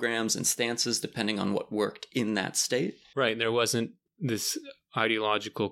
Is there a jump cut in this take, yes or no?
no